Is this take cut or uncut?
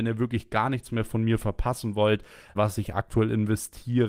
cut